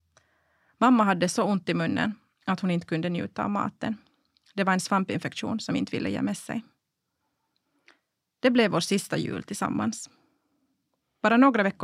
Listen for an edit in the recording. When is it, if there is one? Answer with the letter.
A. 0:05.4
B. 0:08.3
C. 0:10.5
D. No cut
D